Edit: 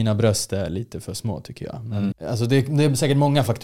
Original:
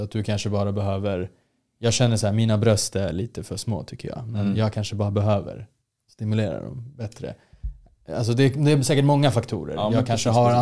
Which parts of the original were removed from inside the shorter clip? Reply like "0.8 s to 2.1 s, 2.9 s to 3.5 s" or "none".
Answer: 4.5 s to 8.0 s